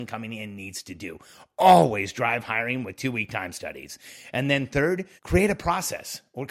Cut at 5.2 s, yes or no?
yes